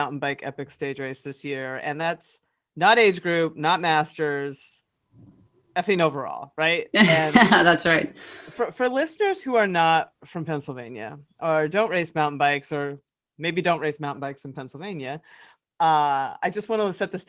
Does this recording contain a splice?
no; 0 cuts

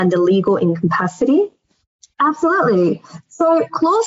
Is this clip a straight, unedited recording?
no; 1 cut; at 2.0 s

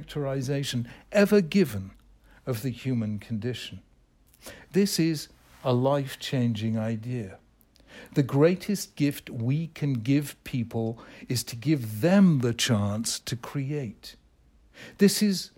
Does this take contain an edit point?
no; 0 cuts

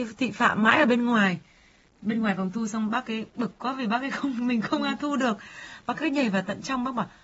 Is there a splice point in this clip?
no; 0 cuts

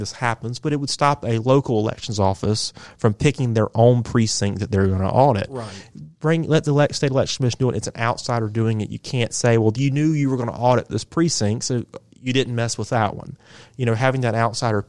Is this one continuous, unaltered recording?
yes; 0 cuts

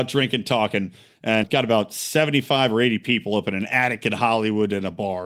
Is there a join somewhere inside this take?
yes; 1 cut; at 1.4 s

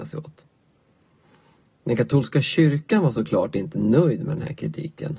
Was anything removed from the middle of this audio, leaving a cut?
no; 0 cuts

